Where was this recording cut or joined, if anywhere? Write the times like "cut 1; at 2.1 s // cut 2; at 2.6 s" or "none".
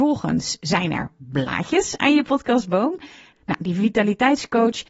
cut 1; at 3.3 s